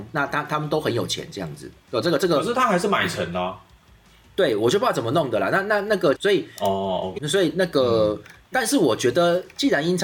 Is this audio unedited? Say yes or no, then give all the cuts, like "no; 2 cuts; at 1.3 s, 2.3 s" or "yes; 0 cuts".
no; 3 cuts; at 1.8 s, 6.1 s, 7.2 s